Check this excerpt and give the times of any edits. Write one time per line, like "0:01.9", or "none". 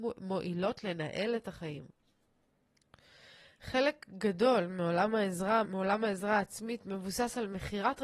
0:05.6